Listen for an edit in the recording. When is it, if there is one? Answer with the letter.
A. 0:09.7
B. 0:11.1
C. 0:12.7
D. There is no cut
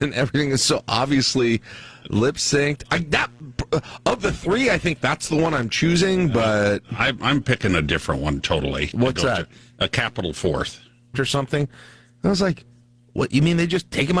B